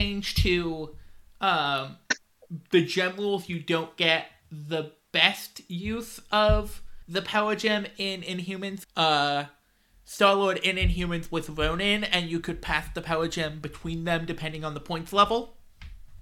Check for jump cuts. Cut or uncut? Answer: cut